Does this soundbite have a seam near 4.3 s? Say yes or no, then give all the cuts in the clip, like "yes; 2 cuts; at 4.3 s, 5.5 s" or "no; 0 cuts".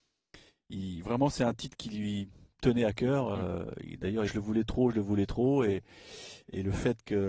yes; 1 cut; at 4.3 s